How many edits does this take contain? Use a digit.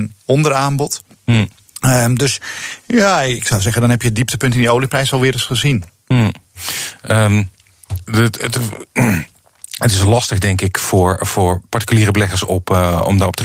0